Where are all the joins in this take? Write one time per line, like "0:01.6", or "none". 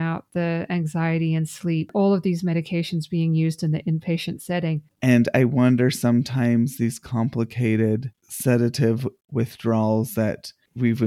0:04.9
0:08.1